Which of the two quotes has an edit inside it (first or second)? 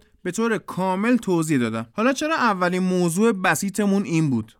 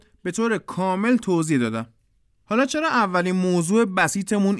first